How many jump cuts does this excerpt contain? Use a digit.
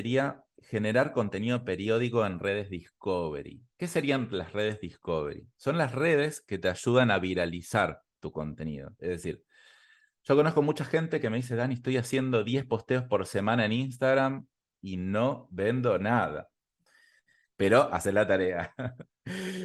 2